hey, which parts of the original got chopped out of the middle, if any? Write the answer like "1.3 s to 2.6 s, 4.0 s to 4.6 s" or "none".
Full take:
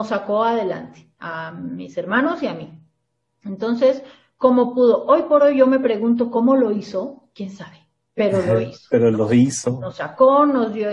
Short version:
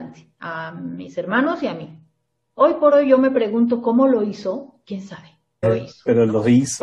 3.4 s to 5.1 s, 8.1 s to 8.5 s